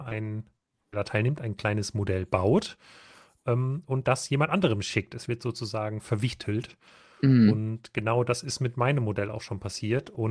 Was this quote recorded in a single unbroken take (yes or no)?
yes